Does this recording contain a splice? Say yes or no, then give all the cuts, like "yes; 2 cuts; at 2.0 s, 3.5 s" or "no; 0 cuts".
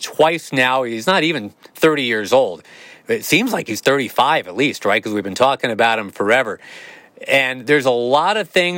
no; 0 cuts